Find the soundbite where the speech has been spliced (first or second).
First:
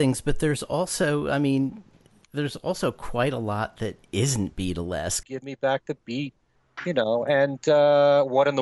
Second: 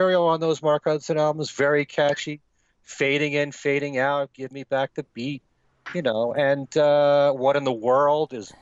first